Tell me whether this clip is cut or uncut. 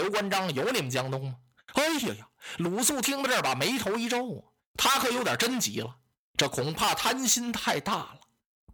cut